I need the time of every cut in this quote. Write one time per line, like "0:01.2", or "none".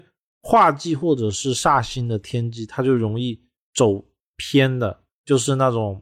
0:05.1